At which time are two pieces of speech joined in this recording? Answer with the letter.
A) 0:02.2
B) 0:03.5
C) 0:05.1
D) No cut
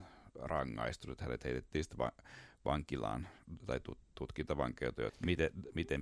C